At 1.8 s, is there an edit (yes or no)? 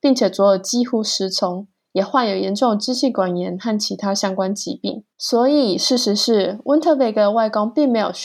no